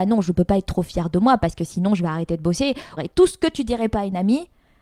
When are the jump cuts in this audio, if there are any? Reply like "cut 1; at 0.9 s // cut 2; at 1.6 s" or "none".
cut 1; at 3.0 s

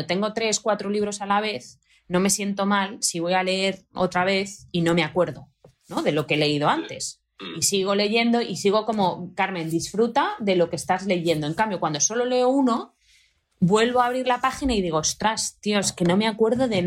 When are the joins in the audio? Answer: none

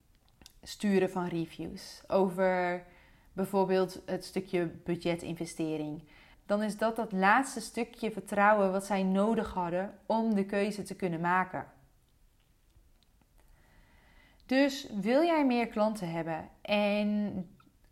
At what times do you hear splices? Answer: cut 1; at 6.3 s

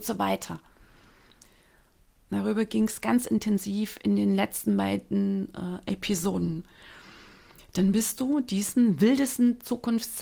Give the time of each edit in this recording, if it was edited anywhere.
cut 1; at 2.2 s

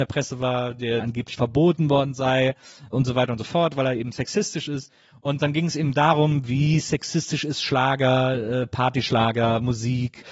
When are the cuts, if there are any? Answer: cut 1; at 1.0 s

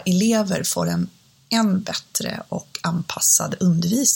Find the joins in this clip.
none

